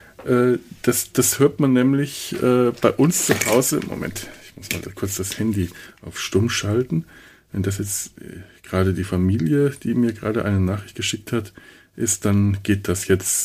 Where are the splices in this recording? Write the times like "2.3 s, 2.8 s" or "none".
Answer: none